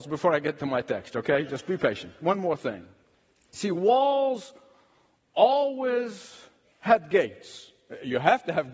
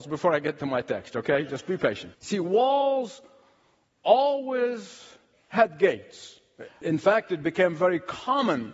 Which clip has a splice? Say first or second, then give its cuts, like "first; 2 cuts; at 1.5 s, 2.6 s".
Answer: second; 2 cuts; at 2.1 s, 6.7 s